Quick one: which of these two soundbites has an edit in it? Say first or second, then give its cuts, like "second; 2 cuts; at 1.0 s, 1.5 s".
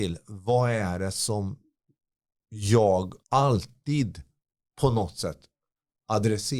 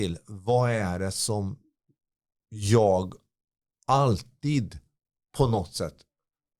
first; 1 cut; at 3.2 s